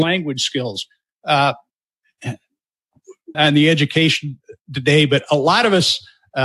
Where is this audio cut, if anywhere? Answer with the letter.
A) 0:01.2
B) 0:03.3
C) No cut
B